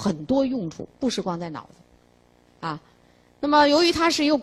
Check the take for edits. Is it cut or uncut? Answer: uncut